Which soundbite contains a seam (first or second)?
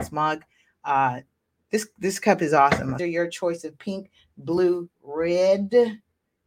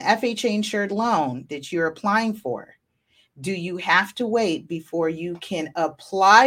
first